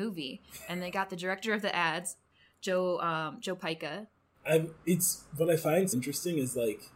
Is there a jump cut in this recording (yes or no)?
yes